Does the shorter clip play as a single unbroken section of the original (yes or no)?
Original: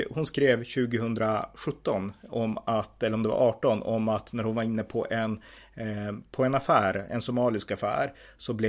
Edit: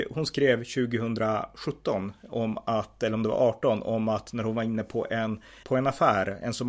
no